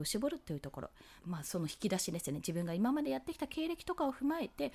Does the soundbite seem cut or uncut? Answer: cut